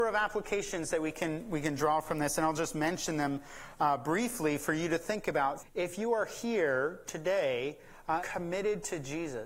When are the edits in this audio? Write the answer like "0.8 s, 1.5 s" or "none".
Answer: 5.6 s, 8.2 s